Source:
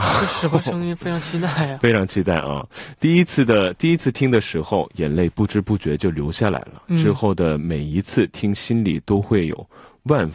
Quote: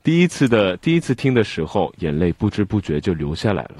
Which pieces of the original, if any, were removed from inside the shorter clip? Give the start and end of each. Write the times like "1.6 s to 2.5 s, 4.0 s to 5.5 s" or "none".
none